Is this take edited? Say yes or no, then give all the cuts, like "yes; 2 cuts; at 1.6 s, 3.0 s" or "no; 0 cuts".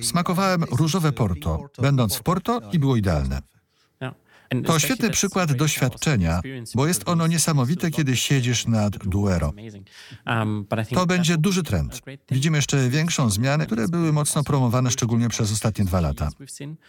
yes; 1 cut; at 13.6 s